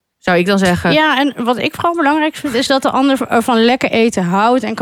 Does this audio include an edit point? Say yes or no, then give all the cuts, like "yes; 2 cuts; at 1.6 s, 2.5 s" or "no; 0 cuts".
no; 0 cuts